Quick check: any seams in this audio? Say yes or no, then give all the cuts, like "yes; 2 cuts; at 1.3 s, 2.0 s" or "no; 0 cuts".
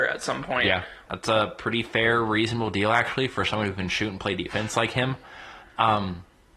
yes; 1 cut; at 1.1 s